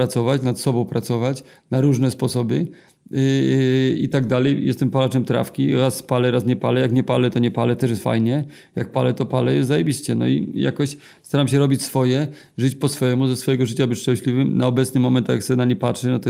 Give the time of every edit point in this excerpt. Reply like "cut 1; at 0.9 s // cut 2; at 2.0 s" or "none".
none